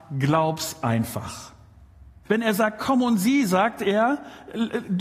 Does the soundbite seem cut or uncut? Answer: cut